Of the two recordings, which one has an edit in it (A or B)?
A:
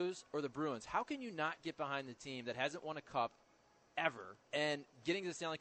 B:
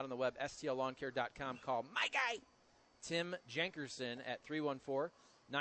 A